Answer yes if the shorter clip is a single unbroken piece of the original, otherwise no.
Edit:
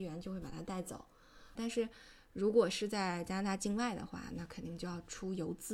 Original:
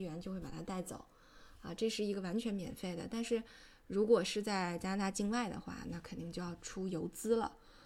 no